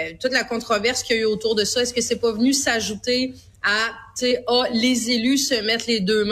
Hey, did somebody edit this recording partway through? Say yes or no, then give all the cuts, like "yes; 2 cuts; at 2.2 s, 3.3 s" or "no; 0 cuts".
no; 0 cuts